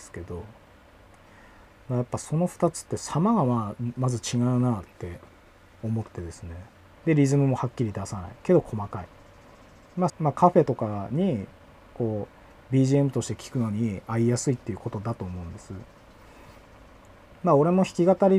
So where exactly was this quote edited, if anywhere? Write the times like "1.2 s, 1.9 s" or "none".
7.0 s, 10.1 s